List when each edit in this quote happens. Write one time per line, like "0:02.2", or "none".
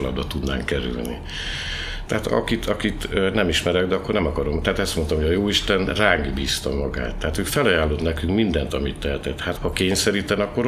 0:02.1
0:09.6